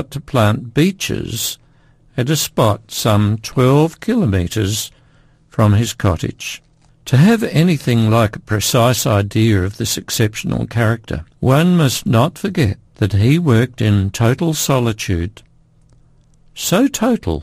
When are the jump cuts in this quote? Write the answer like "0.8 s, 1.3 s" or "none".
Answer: 6.9 s, 11.3 s, 12.9 s